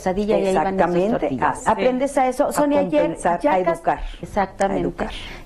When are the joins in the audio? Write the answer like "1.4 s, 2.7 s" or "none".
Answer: 1.6 s, 4.2 s